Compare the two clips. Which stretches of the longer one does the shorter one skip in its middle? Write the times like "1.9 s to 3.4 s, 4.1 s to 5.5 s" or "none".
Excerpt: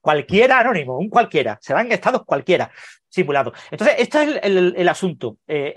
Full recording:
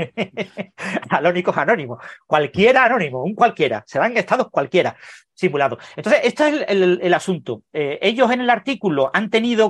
none